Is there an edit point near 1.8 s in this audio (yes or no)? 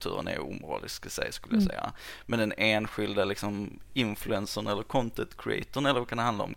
no